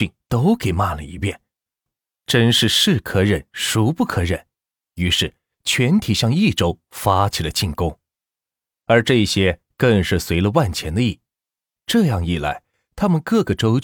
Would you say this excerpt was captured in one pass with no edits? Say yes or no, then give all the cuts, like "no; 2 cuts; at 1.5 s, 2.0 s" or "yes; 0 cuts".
yes; 0 cuts